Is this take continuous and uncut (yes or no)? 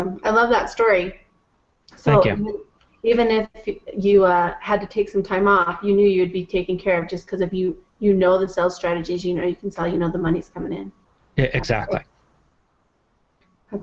yes